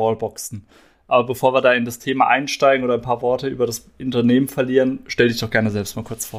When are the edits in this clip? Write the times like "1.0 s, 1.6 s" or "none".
none